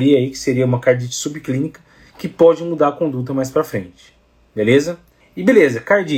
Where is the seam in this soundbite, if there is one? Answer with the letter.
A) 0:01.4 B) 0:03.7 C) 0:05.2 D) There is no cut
C